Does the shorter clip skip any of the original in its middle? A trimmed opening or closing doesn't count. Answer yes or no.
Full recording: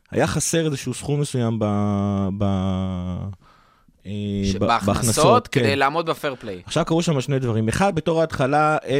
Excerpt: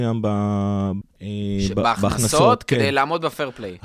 yes